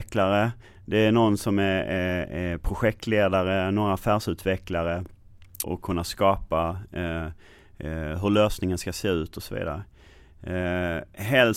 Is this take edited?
yes; 1 cut; at 5.6 s

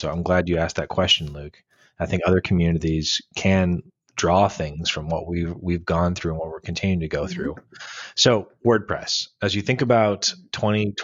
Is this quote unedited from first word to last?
yes; 0 cuts

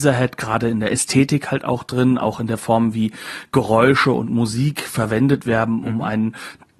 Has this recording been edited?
no; 0 cuts

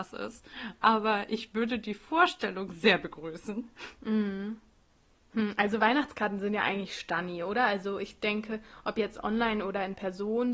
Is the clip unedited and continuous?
yes; 0 cuts

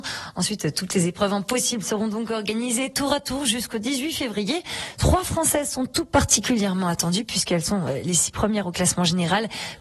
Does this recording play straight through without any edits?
yes; 0 cuts

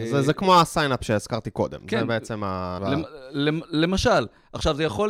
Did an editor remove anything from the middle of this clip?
yes; 1 cut; at 2.8 s

